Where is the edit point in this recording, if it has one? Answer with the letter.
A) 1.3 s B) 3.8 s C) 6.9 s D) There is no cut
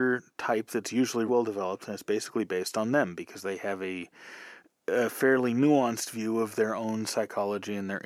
A